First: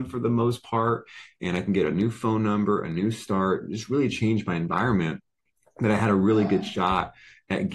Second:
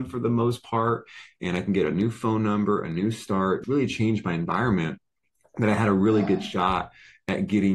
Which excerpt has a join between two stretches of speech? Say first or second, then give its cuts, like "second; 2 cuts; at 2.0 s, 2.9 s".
second; 1 cut; at 3.6 s